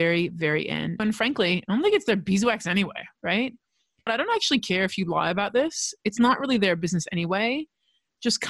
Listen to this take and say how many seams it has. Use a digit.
2